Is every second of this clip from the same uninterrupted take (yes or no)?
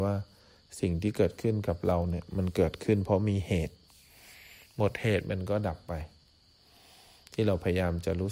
yes